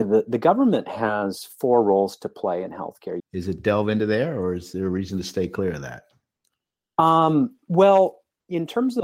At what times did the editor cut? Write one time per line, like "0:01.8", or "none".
0:03.2